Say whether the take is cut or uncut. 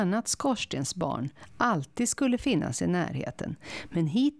uncut